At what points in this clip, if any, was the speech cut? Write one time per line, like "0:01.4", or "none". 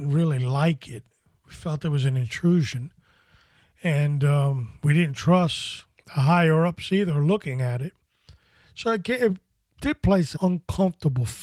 0:10.3